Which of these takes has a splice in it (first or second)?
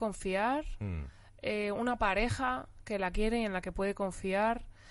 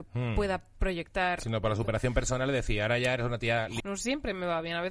second